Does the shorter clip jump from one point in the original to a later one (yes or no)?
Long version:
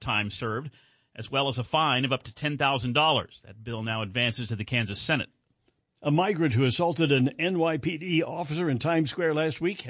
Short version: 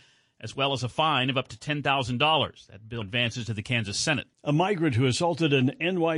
yes